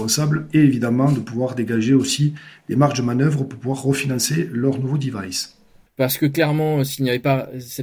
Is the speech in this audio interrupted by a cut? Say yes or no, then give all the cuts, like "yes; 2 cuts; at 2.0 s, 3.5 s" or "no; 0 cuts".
yes; 1 cut; at 5.9 s